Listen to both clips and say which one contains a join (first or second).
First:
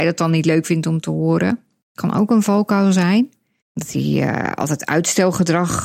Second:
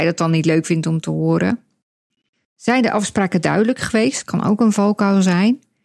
first